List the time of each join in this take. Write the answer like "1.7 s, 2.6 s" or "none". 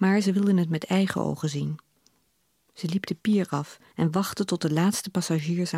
3.9 s